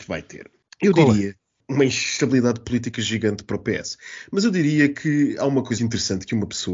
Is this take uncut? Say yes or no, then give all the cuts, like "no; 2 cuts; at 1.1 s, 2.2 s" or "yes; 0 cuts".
no; 1 cut; at 5.8 s